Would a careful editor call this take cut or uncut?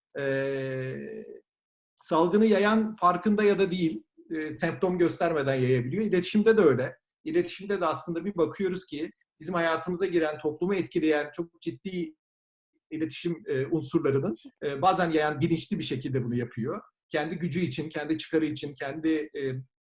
uncut